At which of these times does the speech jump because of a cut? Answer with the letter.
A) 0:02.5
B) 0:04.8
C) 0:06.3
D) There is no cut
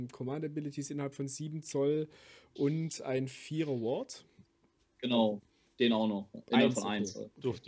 B